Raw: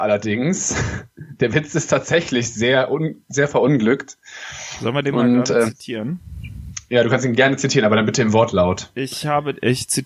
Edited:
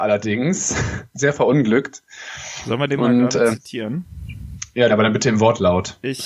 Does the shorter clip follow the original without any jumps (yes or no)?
no